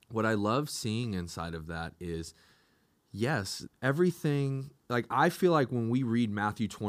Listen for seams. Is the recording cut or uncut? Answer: cut